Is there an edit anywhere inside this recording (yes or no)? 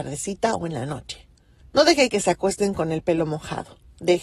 no